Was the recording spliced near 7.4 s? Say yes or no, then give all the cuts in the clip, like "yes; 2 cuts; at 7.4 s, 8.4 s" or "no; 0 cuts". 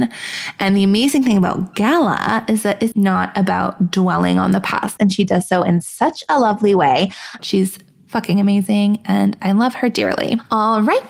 yes; 3 cuts; at 2.9 s, 5.0 s, 7.4 s